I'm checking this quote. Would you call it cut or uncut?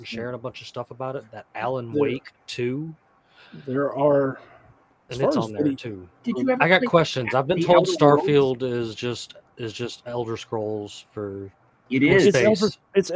cut